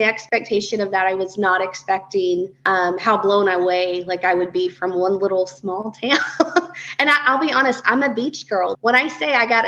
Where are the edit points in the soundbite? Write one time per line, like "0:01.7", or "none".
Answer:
0:08.7